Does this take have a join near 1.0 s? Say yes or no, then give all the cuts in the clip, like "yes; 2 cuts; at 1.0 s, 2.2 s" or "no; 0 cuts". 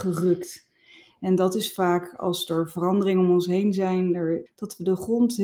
no; 1 cut; at 4.5 s